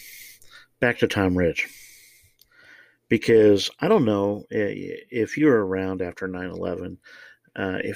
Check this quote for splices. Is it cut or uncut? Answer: uncut